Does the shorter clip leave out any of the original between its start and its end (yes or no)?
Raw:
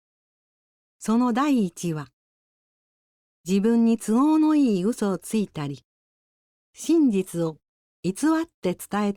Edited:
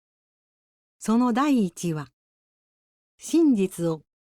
yes